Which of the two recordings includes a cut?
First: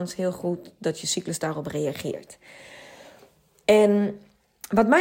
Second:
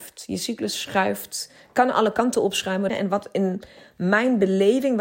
second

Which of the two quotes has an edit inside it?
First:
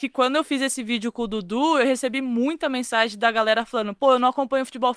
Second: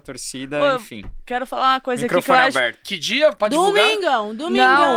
second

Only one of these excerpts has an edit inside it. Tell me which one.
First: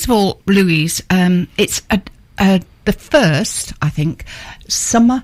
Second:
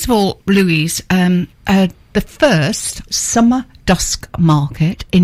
second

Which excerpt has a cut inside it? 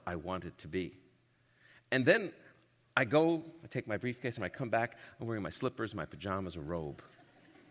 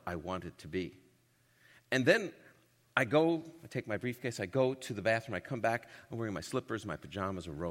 first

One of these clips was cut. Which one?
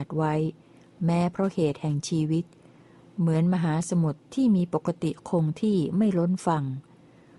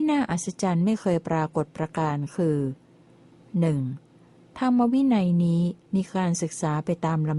second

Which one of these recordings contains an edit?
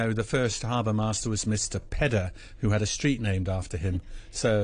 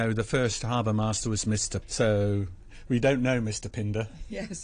second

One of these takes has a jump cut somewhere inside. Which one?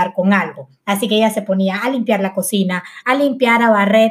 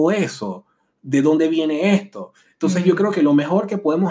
first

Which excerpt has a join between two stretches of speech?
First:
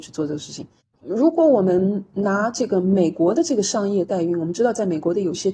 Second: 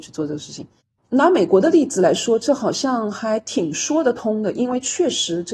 first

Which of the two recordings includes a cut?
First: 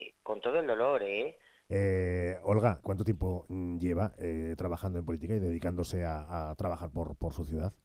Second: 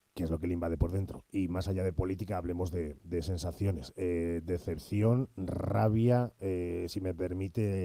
first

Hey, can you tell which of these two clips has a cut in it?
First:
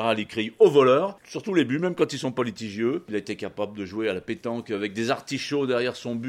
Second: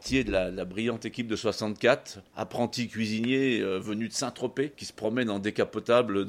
second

